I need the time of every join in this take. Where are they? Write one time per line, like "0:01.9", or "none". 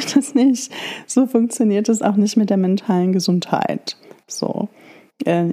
none